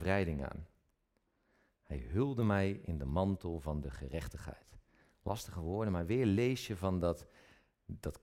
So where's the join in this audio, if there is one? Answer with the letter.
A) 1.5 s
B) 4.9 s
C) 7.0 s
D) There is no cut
D